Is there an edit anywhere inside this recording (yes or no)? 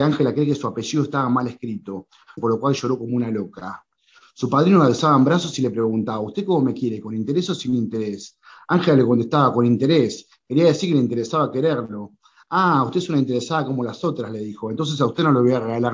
yes